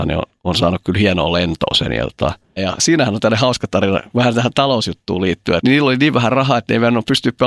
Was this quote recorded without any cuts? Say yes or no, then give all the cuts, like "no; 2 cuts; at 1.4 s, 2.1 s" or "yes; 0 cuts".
no; 2 cuts; at 2.6 s, 5.6 s